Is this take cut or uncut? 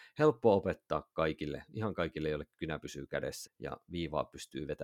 cut